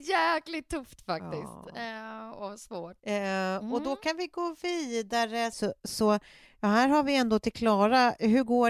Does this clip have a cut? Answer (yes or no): yes